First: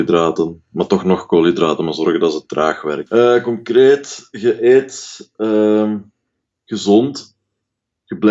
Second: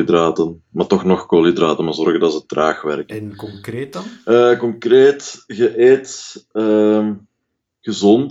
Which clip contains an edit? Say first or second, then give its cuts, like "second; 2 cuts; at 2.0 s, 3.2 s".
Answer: first; 1 cut; at 3.1 s